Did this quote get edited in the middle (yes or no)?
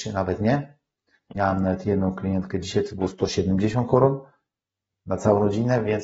yes